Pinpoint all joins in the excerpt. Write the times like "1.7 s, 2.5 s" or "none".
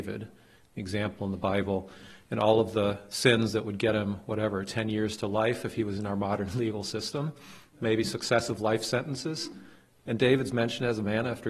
none